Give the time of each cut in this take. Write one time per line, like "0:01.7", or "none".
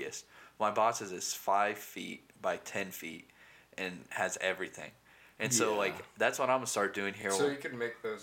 none